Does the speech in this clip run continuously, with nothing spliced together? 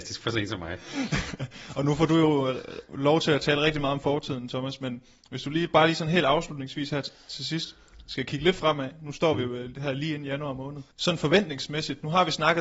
no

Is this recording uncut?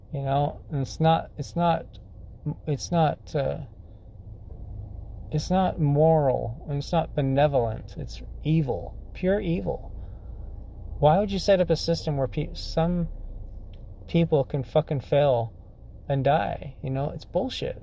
yes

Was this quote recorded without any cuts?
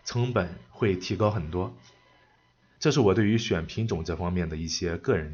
no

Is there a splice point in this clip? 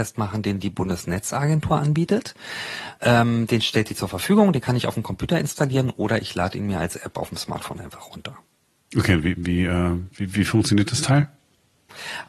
no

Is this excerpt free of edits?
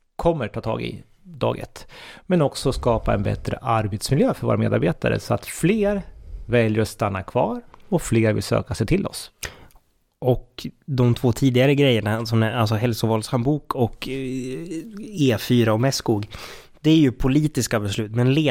yes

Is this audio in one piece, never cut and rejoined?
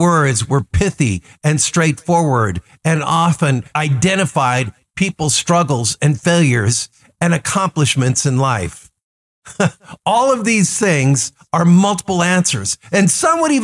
no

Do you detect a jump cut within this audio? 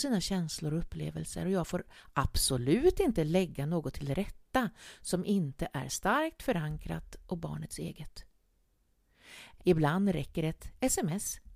yes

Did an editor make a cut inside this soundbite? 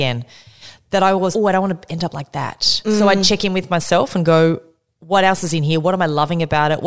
yes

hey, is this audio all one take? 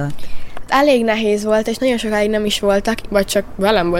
no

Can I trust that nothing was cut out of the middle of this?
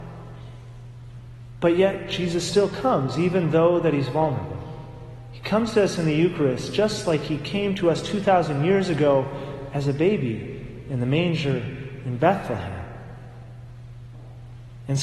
yes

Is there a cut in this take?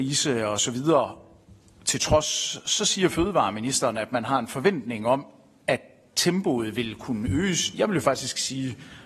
no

